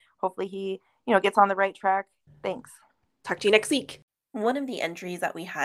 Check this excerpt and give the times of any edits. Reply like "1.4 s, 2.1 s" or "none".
2.3 s